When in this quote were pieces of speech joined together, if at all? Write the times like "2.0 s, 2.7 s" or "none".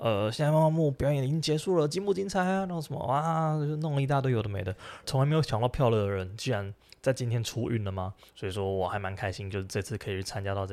5.0 s, 8.3 s